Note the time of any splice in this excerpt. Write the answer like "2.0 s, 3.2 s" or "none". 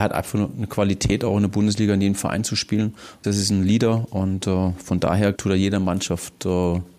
3.2 s, 5.3 s